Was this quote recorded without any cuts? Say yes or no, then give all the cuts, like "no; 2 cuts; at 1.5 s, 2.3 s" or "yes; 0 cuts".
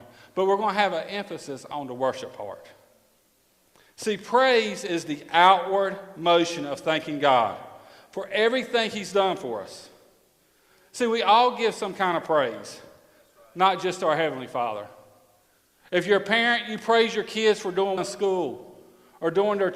no; 1 cut; at 18.0 s